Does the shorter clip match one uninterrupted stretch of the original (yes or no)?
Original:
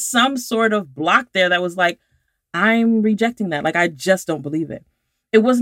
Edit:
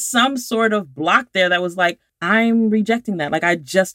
no